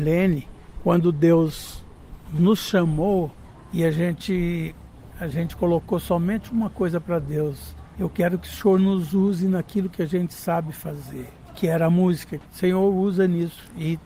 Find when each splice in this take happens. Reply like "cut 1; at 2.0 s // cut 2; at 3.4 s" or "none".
cut 1; at 12.4 s